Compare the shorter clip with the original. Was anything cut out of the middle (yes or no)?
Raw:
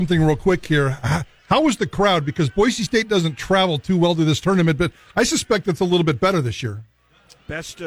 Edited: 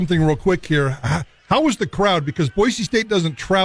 no